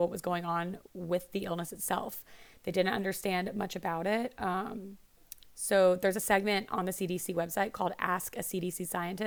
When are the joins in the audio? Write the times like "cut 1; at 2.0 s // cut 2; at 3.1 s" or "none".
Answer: none